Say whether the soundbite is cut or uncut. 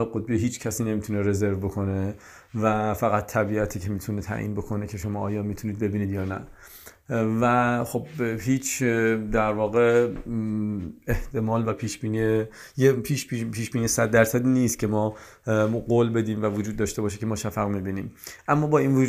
uncut